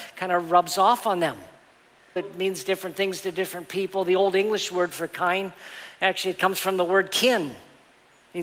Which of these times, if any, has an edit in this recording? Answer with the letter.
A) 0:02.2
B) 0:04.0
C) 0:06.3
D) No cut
A